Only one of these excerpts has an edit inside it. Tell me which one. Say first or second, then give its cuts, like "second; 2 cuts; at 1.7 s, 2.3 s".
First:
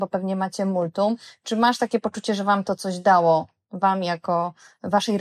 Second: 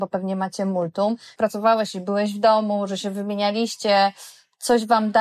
second; 1 cut; at 1.4 s